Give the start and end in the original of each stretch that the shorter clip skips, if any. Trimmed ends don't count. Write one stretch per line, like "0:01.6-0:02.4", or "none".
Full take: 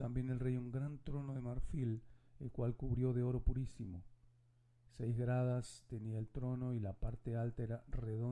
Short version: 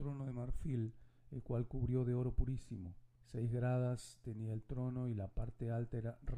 0:04.2-0:04.8

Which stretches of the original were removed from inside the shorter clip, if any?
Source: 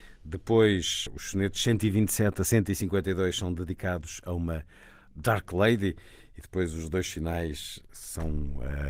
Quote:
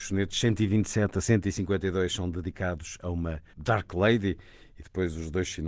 0:04.7-0:05.1

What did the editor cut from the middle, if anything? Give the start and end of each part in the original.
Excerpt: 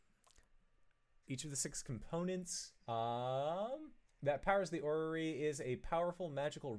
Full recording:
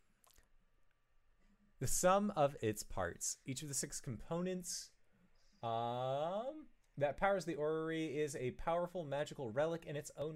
0:01.2-0:03.4
0:05.0-0:05.5

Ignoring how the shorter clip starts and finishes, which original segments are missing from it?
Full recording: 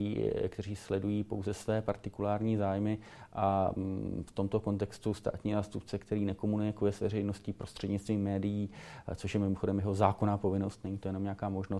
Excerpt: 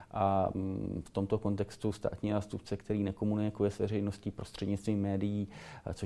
none

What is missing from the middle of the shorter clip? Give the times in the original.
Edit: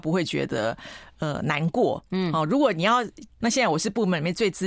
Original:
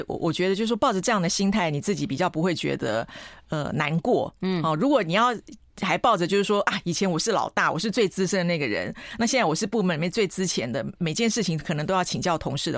0:05.7-0:09.2

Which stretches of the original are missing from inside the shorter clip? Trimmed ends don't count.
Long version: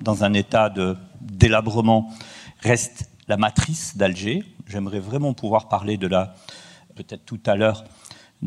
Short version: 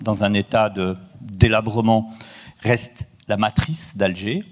none

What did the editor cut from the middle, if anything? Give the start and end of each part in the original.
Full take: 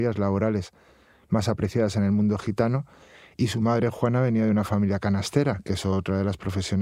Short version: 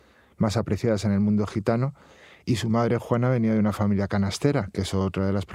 none

